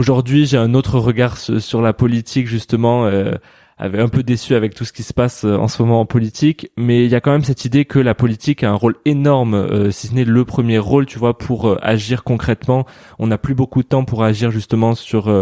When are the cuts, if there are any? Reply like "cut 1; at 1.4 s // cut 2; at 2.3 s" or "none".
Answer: none